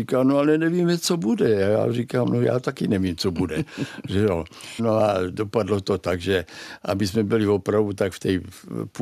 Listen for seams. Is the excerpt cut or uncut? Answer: cut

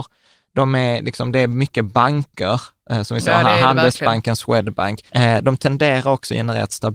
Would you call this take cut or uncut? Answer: cut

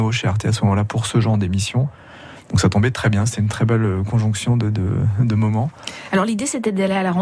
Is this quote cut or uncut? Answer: uncut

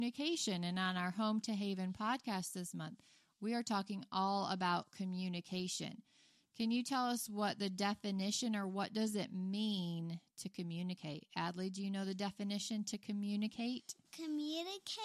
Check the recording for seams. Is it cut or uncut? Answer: uncut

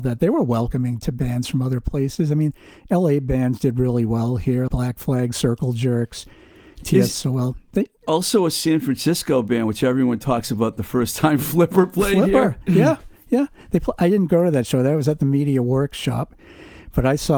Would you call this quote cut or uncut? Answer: cut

